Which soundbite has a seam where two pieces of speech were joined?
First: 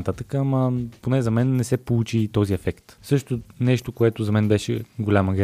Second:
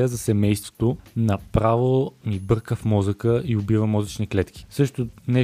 first; 1 cut; at 3.0 s

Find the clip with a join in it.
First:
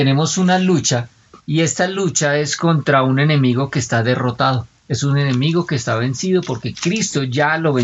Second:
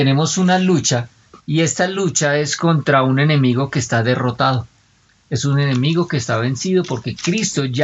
first; 1 cut; at 4.8 s

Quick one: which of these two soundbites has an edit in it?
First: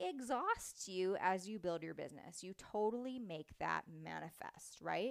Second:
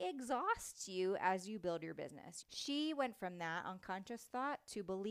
second; 1 cut; at 2.4 s

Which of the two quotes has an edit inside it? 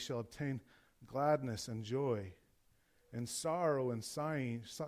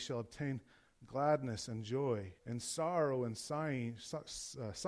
second; 1 cut; at 2.4 s

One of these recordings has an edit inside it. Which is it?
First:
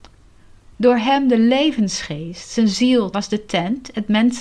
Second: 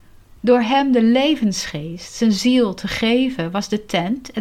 first; 1 cut; at 3.1 s

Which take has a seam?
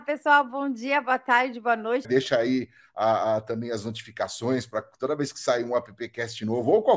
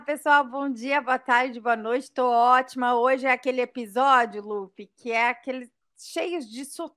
first; 1 cut; at 2.0 s

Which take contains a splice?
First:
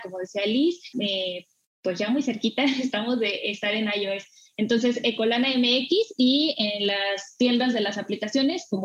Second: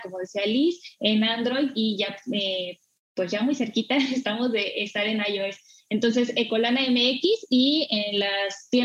first; 1 cut; at 0.9 s

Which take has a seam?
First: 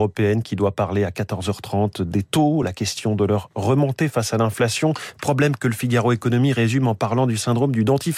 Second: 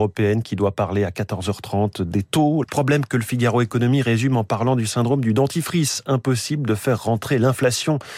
second; 1 cut; at 2.6 s

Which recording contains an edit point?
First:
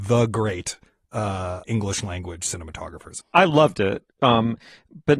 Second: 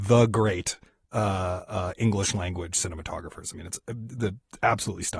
first; 2 cuts; at 1.6 s, 3.2 s

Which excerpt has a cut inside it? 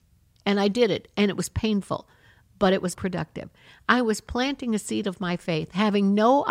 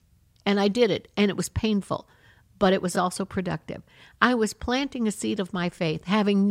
first; 1 cut; at 2.9 s

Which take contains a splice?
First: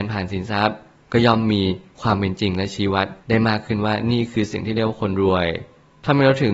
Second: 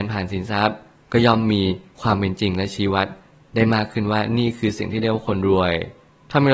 first; 1 cut; at 3.2 s

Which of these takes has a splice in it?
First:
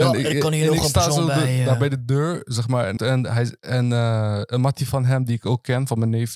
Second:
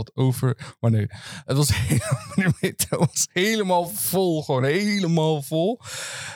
first; 1 cut; at 3.0 s

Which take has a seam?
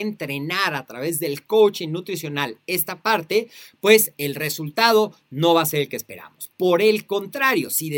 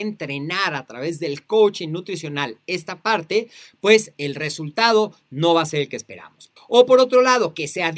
second; 1 cut; at 6.6 s

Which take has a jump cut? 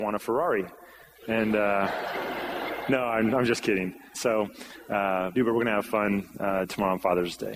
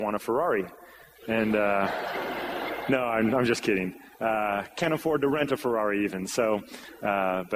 first; 2 cuts; at 4.1 s, 5.3 s

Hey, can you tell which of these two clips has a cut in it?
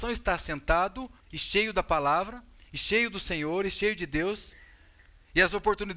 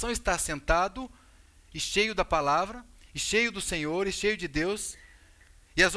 first; 1 cut; at 1.2 s

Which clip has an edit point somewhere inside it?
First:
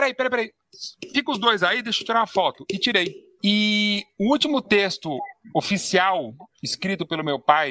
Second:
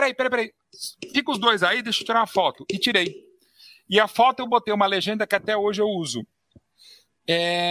first; 2 cuts; at 3.4 s, 6.5 s

